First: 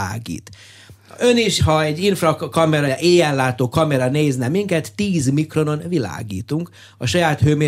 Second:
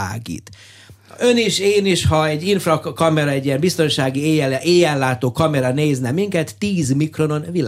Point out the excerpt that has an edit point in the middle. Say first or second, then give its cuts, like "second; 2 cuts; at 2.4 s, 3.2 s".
first; 2 cuts; at 1.6 s, 2.9 s